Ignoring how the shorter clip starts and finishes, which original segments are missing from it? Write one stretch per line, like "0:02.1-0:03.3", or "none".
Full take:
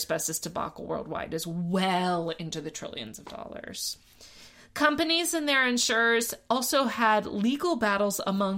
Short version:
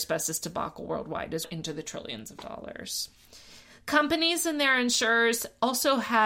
0:01.4-0:02.3